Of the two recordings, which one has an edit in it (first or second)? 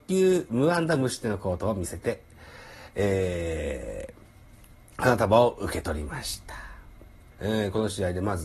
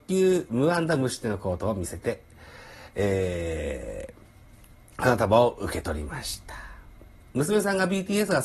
first